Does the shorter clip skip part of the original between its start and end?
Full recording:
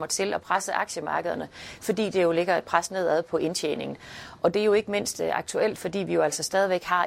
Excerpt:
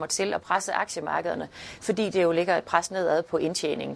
no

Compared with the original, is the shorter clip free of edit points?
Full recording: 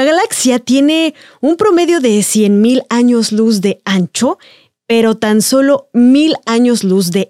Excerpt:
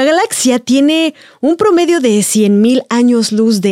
yes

